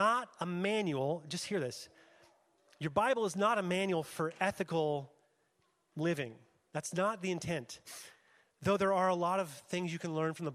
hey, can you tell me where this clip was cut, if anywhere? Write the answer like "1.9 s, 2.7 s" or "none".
none